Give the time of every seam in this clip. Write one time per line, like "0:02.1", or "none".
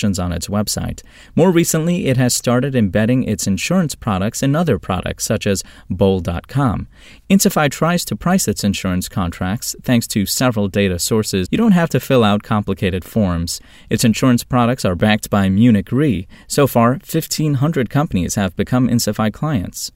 0:11.5